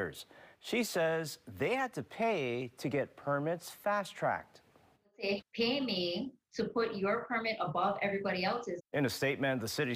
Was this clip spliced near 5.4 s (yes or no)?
yes